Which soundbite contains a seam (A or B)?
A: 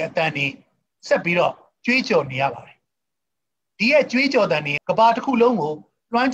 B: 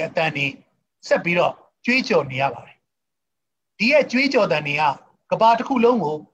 A